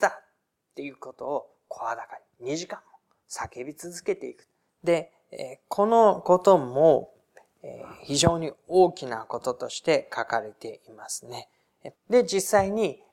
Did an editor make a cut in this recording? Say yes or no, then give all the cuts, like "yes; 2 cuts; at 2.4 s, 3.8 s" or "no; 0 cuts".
yes; 2 cuts; at 4.7 s, 11.9 s